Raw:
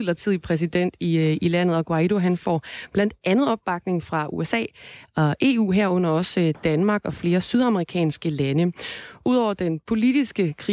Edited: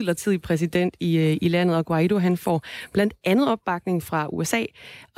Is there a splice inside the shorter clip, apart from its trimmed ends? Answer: no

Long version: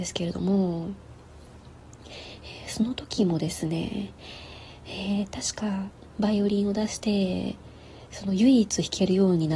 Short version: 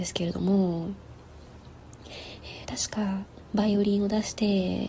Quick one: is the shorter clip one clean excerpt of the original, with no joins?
no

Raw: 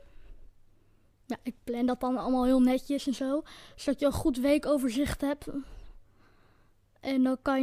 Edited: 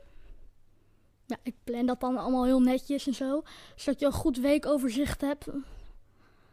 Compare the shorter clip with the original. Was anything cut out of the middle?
no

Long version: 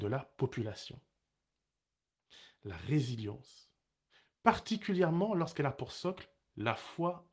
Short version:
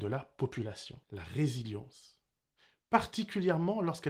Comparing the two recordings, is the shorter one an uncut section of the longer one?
no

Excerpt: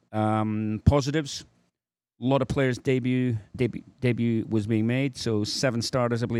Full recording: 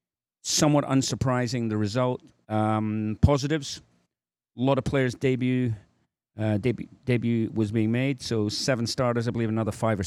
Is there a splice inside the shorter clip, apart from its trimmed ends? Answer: yes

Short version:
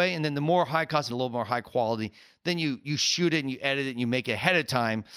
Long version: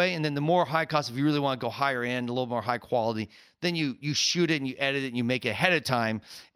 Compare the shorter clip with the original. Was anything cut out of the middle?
yes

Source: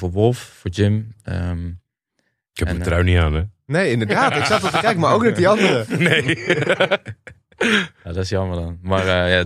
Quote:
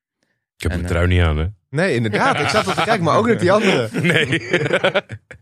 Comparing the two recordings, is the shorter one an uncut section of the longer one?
yes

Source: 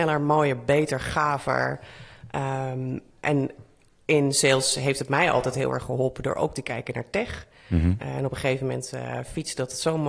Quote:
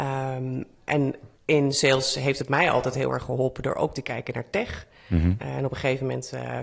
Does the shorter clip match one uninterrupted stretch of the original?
no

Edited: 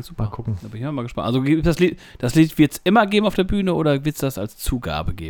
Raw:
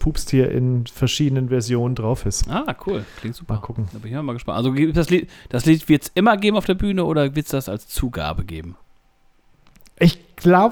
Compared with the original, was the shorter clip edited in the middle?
no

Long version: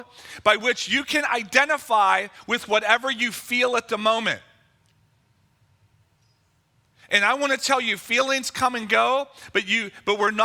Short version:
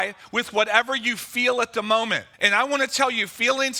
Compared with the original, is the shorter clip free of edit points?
no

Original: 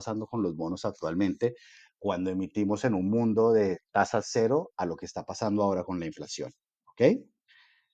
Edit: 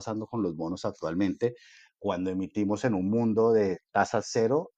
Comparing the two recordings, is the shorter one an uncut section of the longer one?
yes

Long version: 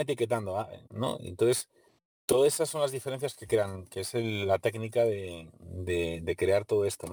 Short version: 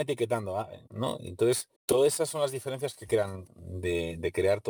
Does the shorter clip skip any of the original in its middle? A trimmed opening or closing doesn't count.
yes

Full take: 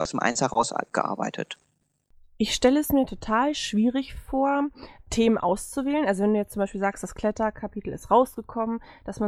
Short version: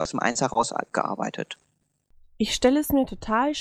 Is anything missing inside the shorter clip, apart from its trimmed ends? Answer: no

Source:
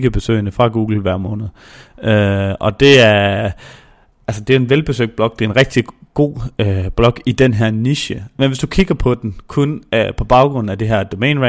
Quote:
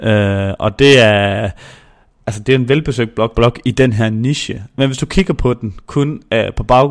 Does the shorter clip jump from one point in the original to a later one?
yes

